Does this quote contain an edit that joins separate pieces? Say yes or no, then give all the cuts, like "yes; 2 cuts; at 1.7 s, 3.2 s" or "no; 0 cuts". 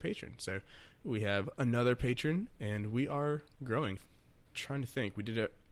yes; 1 cut; at 4.0 s